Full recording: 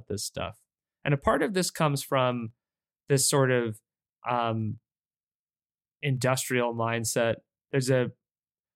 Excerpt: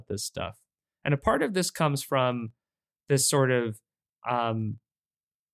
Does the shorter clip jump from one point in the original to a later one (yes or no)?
no